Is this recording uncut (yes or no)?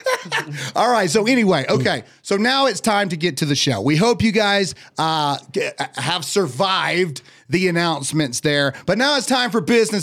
yes